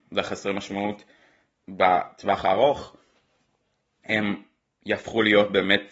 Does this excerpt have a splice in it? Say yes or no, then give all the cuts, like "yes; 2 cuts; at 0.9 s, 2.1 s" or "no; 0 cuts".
no; 0 cuts